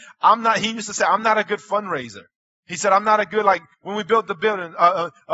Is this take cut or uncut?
uncut